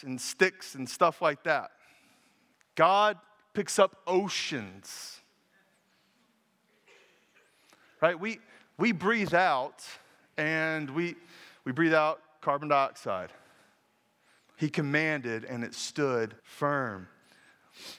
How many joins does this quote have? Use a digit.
2